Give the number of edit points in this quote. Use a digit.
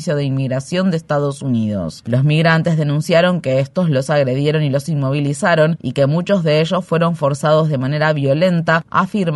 0